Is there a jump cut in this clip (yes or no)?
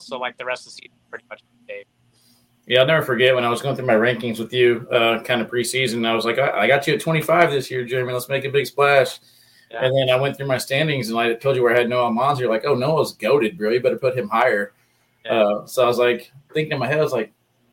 no